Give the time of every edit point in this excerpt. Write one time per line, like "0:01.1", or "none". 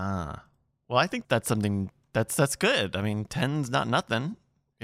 0:01.2